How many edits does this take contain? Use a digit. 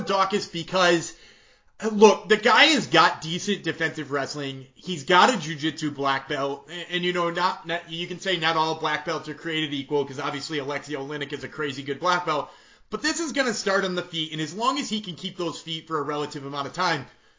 0